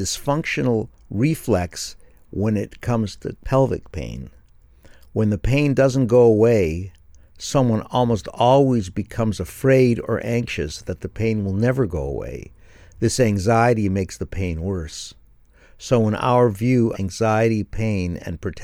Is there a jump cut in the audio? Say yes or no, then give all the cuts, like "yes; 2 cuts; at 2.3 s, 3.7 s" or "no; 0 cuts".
yes; 1 cut; at 16.9 s